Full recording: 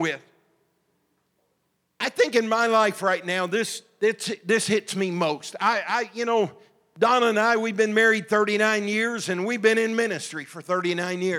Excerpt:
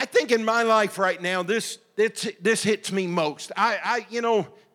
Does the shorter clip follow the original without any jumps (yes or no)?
yes